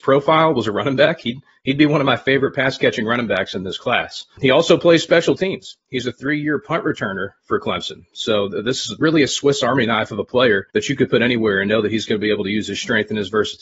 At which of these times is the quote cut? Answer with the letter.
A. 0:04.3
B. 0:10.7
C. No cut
B